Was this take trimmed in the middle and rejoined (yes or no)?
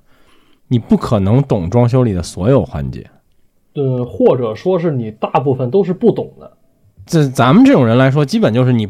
yes